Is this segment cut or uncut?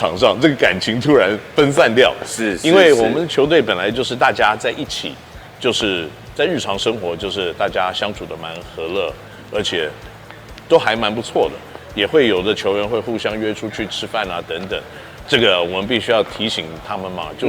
cut